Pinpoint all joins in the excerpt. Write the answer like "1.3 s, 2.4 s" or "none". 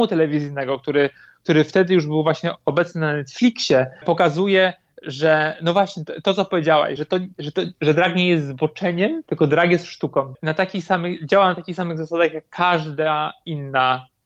none